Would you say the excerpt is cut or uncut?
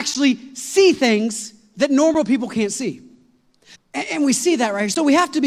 cut